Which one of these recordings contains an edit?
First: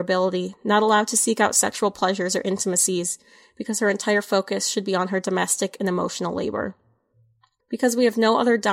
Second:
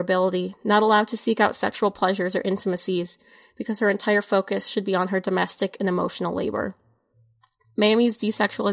first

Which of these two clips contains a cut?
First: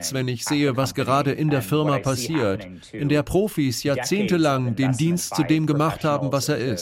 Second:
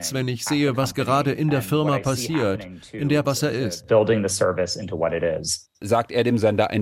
second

